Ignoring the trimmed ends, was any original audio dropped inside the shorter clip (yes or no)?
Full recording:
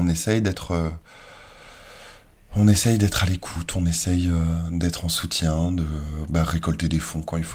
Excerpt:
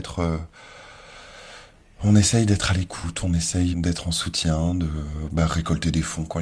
yes